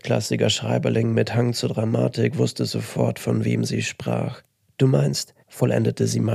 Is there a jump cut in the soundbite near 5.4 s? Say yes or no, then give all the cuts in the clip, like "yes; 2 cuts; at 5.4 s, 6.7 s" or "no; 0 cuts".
yes; 1 cut; at 5.4 s